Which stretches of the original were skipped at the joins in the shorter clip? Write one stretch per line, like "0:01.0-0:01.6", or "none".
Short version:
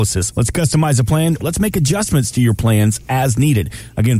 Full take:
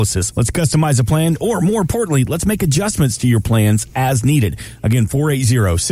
0:01.4-0:02.3